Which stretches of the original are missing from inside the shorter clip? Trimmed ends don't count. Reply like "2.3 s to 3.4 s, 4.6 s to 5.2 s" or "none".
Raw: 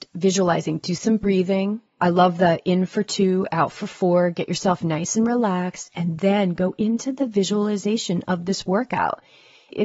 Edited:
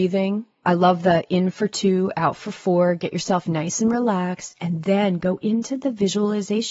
none